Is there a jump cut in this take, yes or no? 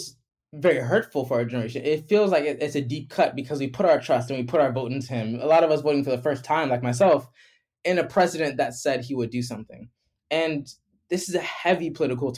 no